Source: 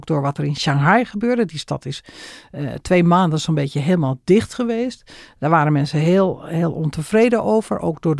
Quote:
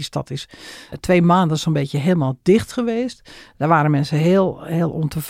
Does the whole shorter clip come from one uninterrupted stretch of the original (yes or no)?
no